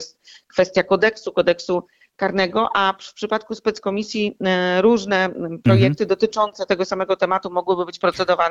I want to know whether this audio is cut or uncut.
uncut